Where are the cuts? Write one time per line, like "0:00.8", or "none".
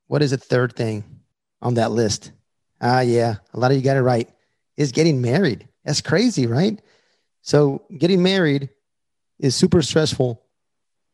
none